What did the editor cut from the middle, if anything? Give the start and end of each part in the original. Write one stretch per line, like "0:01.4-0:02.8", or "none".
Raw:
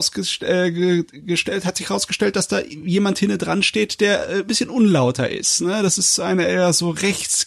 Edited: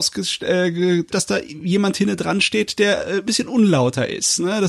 0:01.1-0:02.3